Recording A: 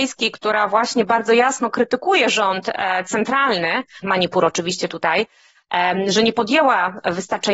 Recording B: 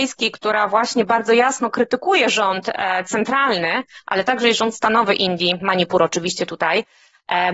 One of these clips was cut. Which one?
A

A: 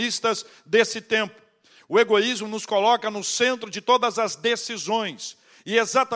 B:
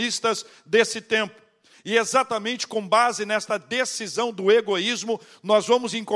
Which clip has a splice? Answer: B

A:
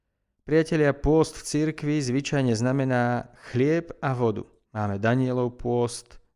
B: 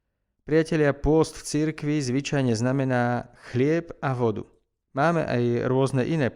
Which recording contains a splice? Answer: A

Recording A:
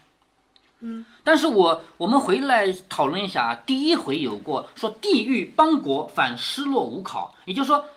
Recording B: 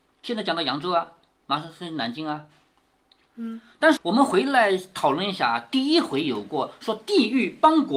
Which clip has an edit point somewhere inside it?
B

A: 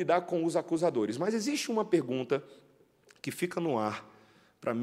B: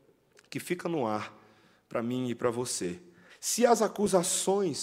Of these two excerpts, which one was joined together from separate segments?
B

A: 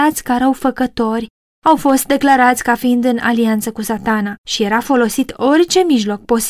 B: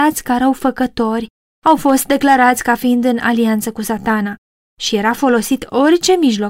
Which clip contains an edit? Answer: A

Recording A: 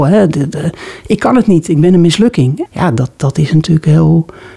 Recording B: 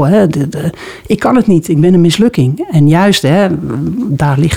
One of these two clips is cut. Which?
A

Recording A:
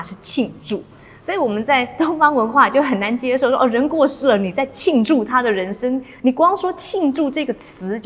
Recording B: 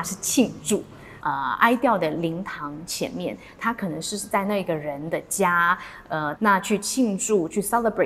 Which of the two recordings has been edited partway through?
B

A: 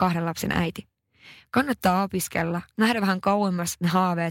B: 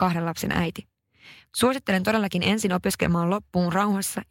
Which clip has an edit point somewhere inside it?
B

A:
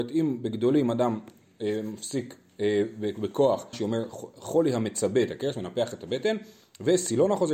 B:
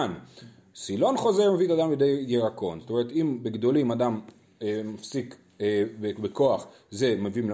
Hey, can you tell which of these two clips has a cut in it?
A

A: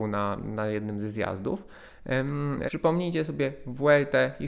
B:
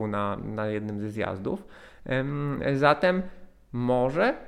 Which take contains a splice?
A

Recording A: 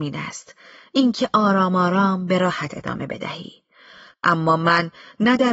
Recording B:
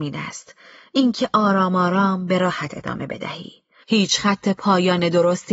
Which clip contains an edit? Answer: B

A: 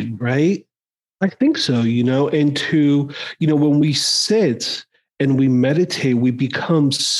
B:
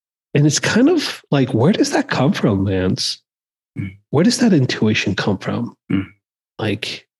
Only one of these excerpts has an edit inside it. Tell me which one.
A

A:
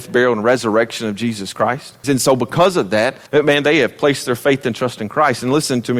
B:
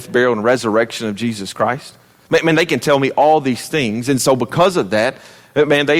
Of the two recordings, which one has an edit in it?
A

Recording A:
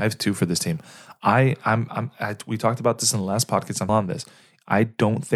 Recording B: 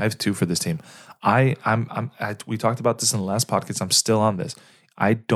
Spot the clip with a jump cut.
A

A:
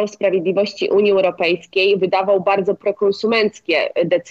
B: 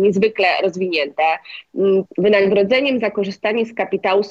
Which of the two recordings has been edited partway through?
B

